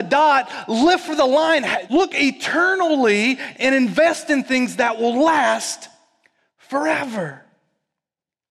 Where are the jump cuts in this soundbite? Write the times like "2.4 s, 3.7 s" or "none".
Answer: 1.9 s